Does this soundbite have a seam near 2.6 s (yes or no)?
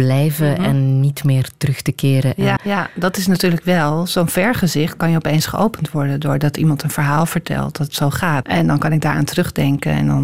yes